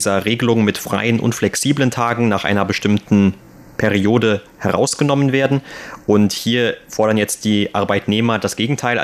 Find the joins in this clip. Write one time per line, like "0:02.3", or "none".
none